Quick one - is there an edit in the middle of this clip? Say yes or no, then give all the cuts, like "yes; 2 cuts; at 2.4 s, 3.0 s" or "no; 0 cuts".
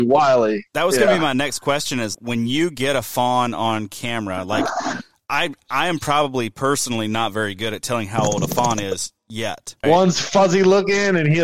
yes; 2 cuts; at 2.1 s, 9.8 s